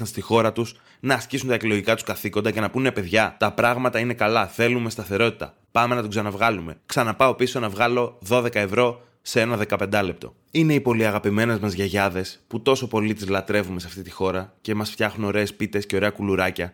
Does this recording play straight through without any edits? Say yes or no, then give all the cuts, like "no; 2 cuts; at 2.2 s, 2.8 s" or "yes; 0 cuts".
yes; 0 cuts